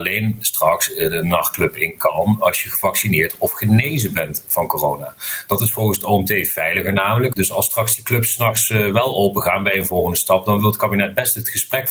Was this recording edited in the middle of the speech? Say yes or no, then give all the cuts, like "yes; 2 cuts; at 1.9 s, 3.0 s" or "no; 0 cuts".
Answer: yes; 1 cut; at 7.3 s